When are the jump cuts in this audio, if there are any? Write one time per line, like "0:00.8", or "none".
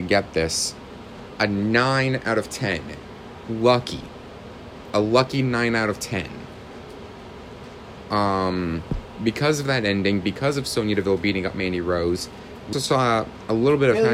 0:12.7

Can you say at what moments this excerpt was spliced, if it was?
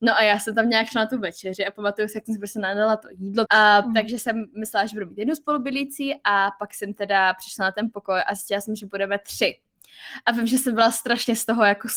0:03.5

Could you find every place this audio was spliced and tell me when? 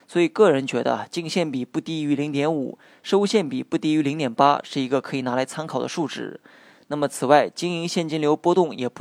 none

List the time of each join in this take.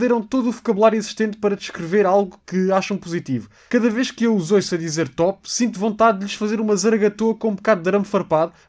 none

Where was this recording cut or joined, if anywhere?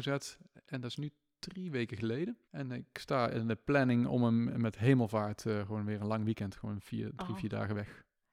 0:02.4

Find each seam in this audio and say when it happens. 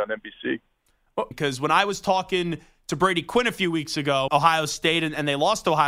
0:01.3
0:04.3

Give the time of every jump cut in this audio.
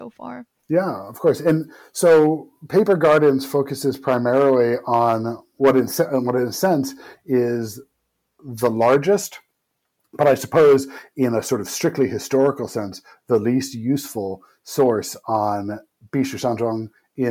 none

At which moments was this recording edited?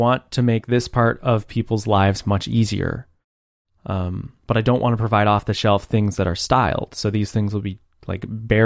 none

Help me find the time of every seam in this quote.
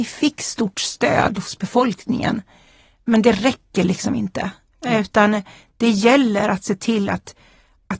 none

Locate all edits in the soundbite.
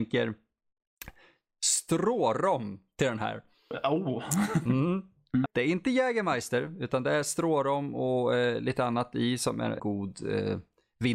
0:05.5
0:09.8

